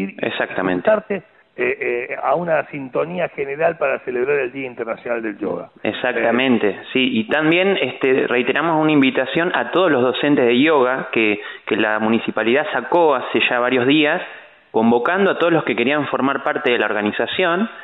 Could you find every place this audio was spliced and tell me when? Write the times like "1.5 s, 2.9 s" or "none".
none